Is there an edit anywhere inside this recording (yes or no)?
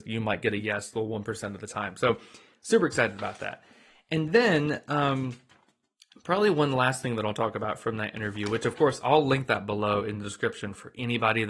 no